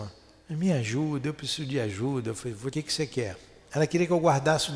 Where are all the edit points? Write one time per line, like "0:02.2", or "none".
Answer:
0:02.7

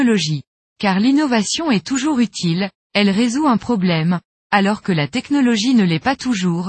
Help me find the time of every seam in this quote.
none

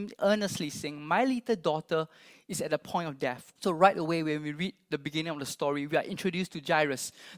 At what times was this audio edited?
0:03.6

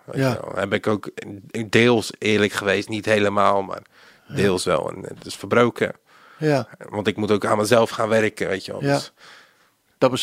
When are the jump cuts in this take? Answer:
none

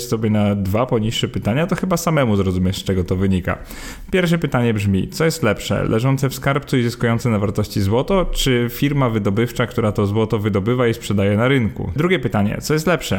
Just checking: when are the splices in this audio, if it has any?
0:12.0

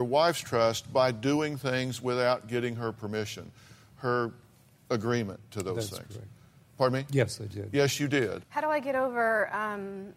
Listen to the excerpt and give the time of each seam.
0:08.4

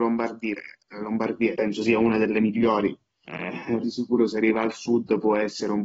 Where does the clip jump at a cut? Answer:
0:01.5
0:03.8

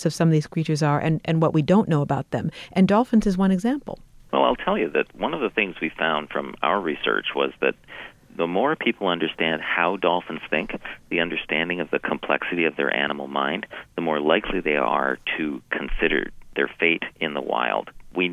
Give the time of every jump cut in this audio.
none

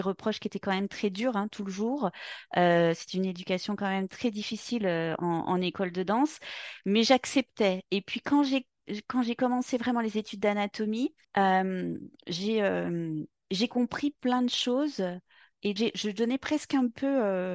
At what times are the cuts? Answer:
0:11.2
0:15.8

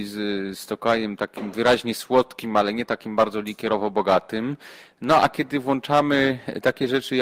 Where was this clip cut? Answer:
none

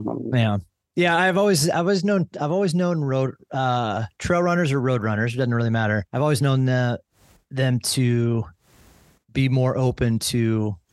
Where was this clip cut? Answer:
none

